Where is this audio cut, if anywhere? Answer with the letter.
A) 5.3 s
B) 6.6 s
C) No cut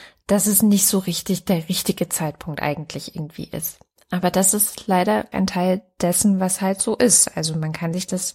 A